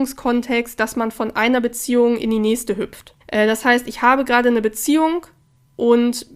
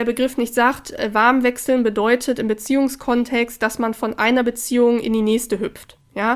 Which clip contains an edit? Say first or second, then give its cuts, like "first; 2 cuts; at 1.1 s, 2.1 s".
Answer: first; 1 cut; at 3.2 s